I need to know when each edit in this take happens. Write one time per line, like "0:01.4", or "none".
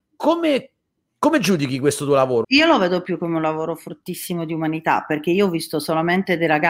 0:02.4